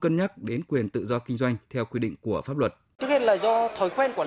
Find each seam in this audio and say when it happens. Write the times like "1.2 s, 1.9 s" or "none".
3.0 s